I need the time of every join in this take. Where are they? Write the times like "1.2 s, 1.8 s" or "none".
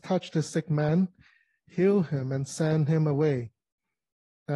none